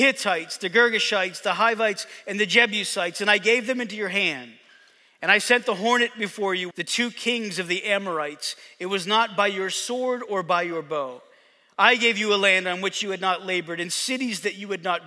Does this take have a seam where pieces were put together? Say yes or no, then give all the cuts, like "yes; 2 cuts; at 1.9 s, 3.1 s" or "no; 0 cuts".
yes; 1 cut; at 6.7 s